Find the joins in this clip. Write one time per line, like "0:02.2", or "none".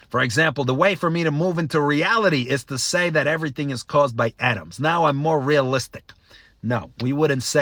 none